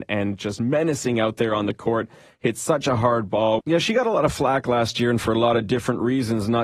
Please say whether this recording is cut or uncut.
cut